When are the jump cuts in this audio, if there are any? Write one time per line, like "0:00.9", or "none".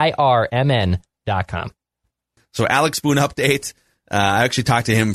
0:02.4